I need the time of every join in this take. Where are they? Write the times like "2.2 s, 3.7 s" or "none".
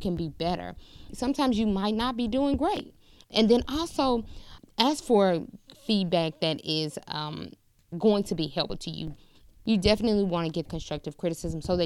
1.1 s, 3.2 s